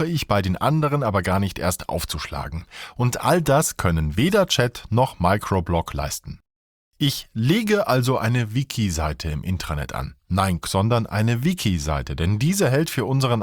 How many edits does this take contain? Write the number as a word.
one